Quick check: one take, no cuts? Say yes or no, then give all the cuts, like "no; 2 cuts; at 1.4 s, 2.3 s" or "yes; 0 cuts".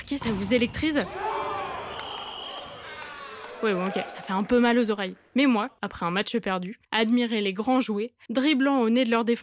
no; 2 cuts; at 5.8 s, 8.3 s